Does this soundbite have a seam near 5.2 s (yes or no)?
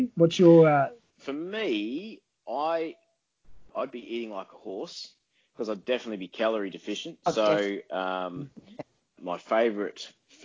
no